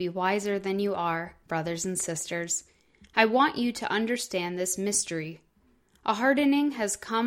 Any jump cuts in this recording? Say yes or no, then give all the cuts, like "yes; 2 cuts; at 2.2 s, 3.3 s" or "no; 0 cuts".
no; 0 cuts